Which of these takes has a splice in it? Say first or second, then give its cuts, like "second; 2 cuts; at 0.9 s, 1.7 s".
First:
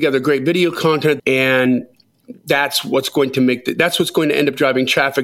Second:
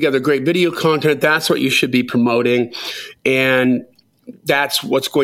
first; 1 cut; at 1.2 s